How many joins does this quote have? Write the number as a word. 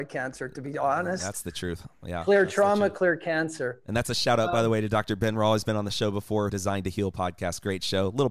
one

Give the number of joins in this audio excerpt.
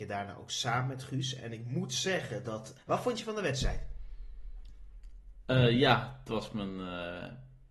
one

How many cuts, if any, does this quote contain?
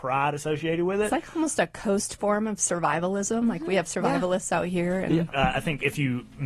one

